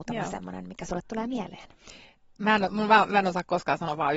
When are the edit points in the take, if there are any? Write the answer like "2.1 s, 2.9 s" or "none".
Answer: none